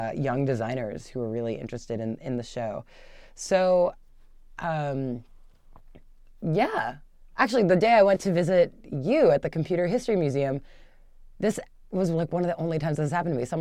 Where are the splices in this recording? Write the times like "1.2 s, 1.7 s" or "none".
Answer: none